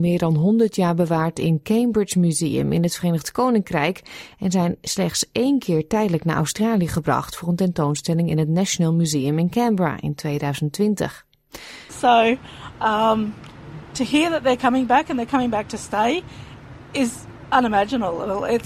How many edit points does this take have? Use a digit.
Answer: 1